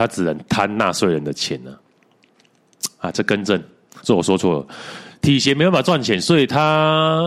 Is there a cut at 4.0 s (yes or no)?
yes